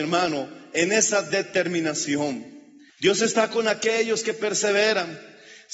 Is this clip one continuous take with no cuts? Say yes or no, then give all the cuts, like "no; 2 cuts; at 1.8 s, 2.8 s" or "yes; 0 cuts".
no; 1 cut; at 2.9 s